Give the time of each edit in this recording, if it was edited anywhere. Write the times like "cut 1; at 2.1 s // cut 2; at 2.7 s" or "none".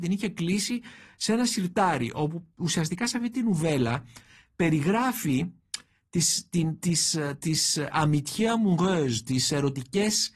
none